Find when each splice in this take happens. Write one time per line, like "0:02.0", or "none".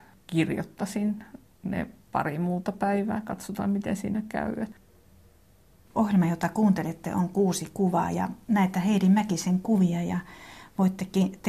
none